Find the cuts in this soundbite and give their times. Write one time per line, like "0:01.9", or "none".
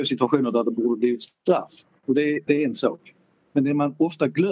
0:02.5